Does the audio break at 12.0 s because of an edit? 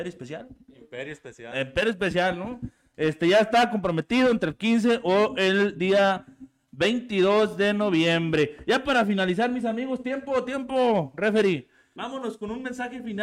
yes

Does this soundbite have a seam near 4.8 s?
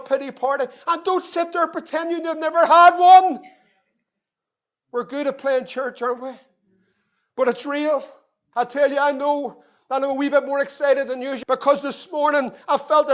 no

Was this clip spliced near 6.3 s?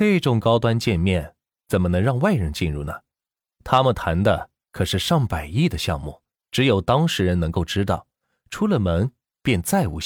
yes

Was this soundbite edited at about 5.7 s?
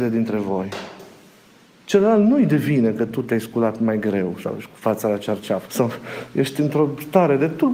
yes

